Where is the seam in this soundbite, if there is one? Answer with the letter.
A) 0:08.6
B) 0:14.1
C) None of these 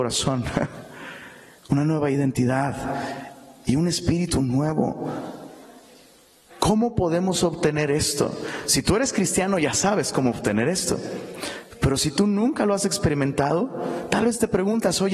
C